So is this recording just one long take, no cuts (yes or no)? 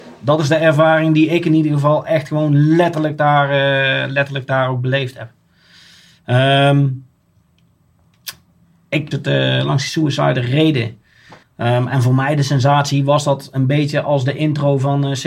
no